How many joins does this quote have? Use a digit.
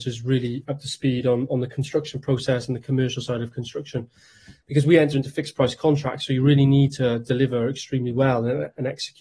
0